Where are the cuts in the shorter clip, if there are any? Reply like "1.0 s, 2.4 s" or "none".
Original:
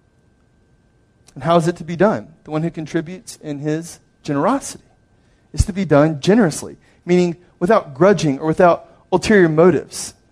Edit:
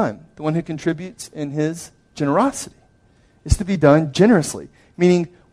none